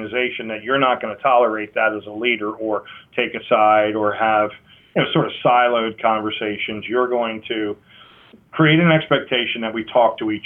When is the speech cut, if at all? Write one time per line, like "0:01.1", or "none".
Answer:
none